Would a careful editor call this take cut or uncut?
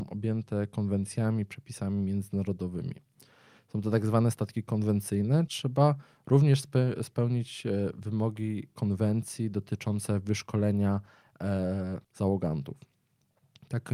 cut